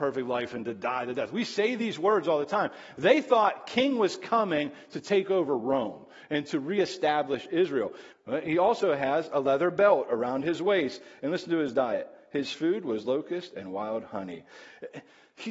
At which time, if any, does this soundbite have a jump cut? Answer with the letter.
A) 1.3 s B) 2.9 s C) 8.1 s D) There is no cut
C